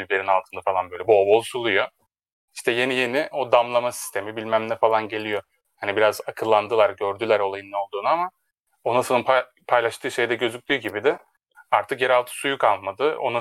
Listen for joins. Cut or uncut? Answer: uncut